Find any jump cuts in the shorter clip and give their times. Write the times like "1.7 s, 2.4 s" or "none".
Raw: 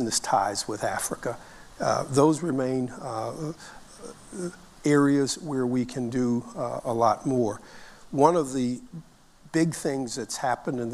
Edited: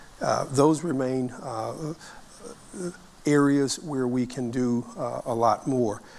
none